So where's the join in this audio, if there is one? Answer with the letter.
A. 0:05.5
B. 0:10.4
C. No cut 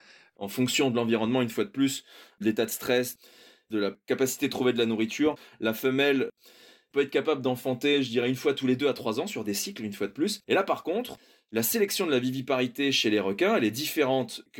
B